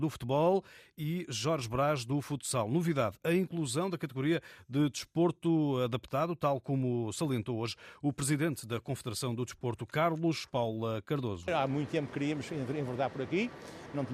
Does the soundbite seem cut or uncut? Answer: uncut